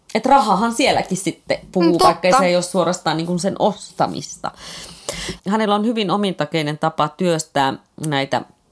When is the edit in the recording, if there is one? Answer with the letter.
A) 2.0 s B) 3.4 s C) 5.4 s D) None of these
C